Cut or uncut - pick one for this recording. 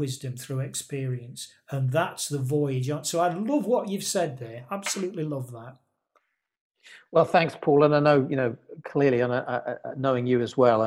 uncut